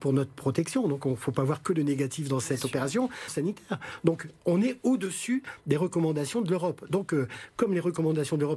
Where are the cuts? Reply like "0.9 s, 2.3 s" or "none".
3.3 s